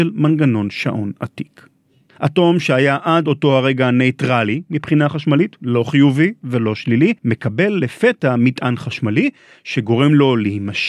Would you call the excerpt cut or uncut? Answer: cut